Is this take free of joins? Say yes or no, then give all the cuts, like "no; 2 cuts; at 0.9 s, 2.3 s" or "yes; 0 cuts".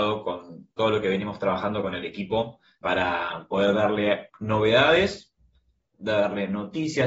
no; 2 cuts; at 2.8 s, 4.3 s